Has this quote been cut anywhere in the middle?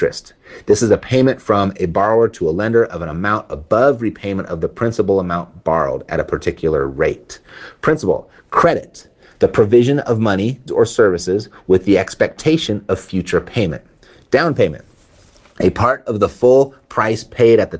yes; 2 cuts; at 8.4 s, 10.7 s

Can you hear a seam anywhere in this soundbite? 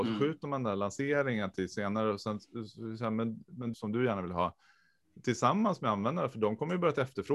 yes; 1 cut; at 3.7 s

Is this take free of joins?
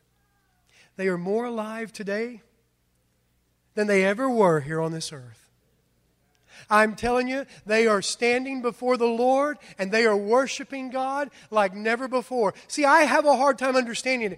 yes; 0 cuts

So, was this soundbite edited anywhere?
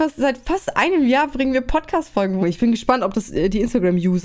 yes; 1 cut; at 2.4 s

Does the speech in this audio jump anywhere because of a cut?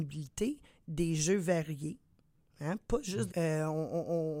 yes; 1 cut; at 3.3 s

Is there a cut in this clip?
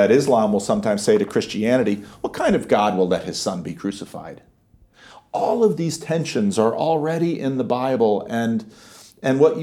no; 0 cuts

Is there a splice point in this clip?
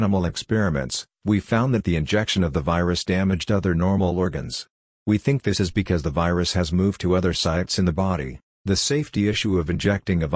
yes; 1 cut; at 8.5 s

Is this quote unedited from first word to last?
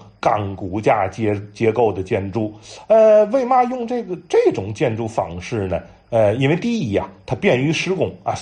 yes; 0 cuts

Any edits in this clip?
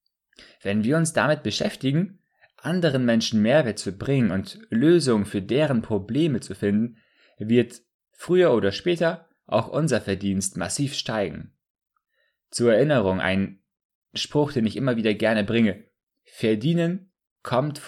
no; 0 cuts

